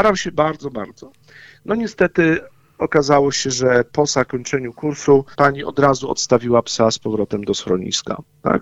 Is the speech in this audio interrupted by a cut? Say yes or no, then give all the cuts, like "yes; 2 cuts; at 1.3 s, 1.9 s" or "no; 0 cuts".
yes; 1 cut; at 5.3 s